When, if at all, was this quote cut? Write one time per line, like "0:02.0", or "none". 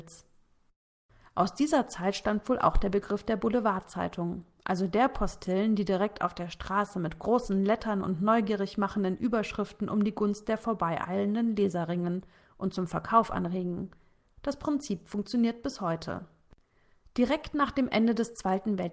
none